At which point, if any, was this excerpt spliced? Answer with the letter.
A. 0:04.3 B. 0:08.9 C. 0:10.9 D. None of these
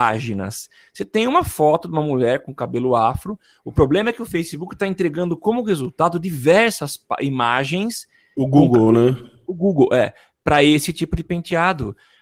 D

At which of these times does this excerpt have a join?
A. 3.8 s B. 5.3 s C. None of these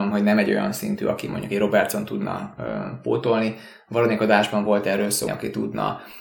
B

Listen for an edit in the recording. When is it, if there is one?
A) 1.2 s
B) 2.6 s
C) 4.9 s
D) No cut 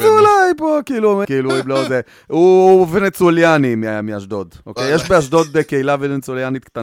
A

